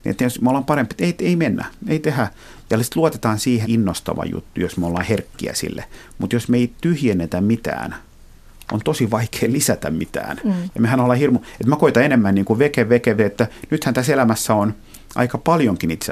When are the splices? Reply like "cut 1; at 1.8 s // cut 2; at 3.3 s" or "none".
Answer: cut 1; at 3.6 s // cut 2; at 13.2 s